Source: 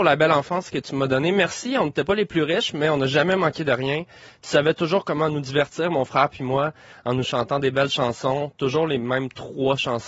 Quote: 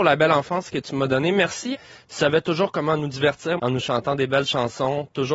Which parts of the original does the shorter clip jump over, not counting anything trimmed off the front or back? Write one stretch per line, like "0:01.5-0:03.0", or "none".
0:01.7-0:04.0
0:05.9-0:07.0